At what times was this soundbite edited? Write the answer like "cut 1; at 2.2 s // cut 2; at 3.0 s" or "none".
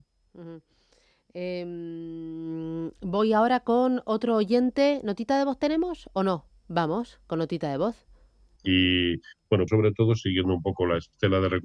cut 1; at 8.6 s // cut 2; at 9.7 s